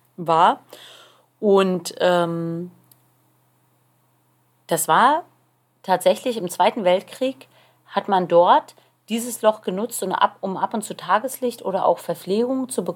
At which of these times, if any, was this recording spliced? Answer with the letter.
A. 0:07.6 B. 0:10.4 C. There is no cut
C